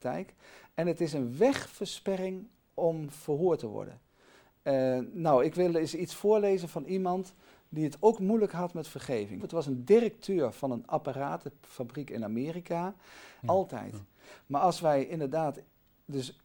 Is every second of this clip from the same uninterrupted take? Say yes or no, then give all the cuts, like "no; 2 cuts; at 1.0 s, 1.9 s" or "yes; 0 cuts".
no; 2 cuts; at 9.4 s, 13.4 s